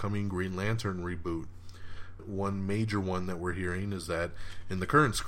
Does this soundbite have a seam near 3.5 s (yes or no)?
no